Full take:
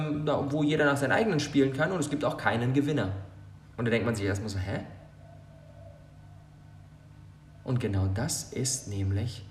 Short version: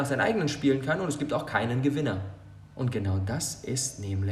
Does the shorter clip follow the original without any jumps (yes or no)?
no